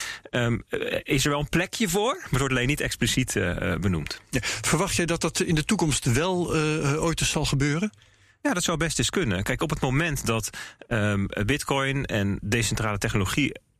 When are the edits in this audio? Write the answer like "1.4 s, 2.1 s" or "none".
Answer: 12.4 s

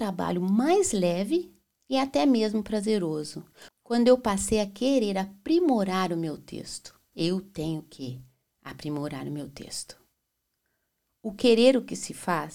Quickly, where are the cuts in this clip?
7.1 s

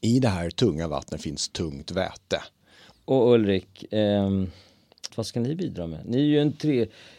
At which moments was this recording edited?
2.9 s, 5.1 s

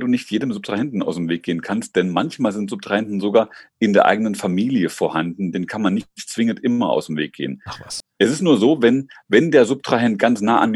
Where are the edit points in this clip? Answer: 8.0 s

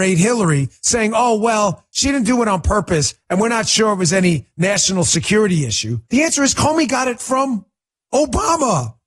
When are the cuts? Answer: 6.0 s

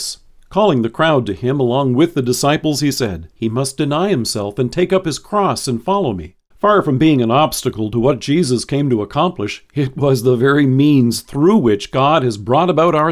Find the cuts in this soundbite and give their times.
3.4 s, 6.5 s

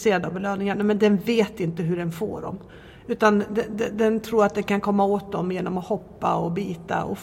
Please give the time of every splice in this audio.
none

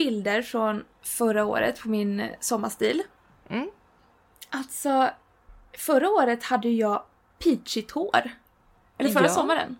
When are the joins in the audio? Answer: none

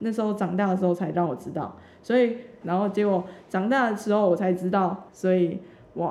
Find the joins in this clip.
2.6 s, 5.1 s

